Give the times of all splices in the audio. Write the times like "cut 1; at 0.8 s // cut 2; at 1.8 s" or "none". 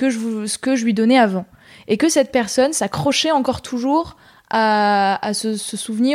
none